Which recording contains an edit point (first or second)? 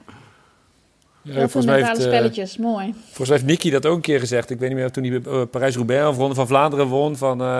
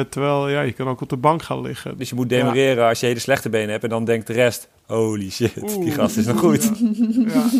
second